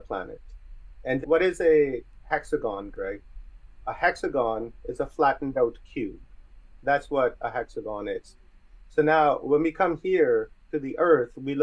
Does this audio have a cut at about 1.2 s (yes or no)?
yes